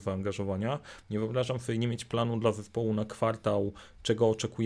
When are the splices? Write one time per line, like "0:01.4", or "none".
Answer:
0:01.0